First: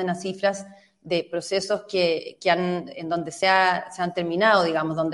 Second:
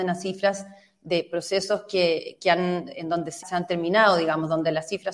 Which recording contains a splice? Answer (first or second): second